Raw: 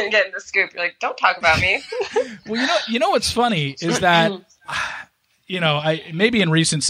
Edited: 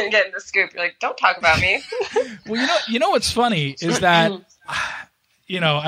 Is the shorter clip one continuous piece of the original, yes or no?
yes